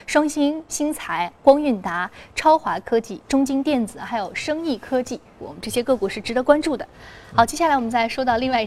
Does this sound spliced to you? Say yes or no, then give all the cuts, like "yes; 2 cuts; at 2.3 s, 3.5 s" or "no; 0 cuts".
yes; 1 cut; at 5.4 s